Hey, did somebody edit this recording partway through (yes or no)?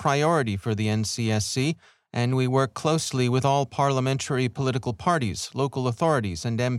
no